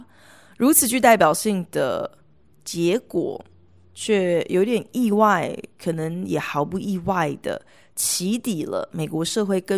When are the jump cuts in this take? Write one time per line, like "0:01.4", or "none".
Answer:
none